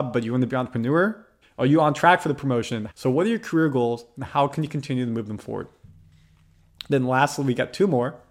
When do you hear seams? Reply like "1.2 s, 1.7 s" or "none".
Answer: 1.4 s, 2.9 s